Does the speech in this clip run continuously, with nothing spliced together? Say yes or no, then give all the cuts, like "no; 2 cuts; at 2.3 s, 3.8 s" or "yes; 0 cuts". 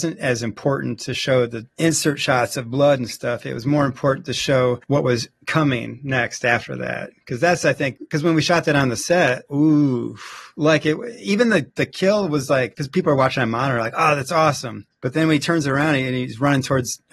no; 1 cut; at 9.5 s